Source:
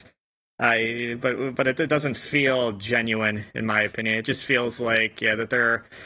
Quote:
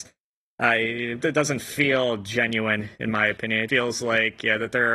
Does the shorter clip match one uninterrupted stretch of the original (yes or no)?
no